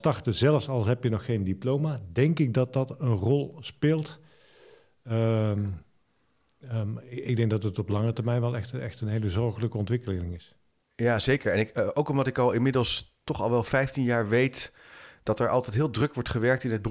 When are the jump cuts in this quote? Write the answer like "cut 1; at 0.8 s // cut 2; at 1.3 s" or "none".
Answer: none

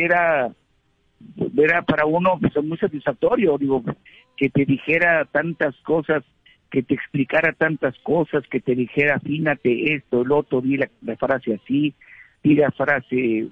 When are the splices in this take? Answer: none

